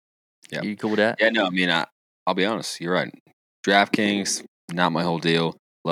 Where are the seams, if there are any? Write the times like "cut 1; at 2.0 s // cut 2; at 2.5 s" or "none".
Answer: none